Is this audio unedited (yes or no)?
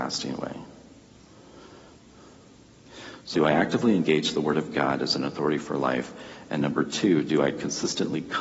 no